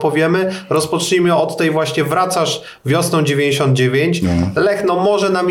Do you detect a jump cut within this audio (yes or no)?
no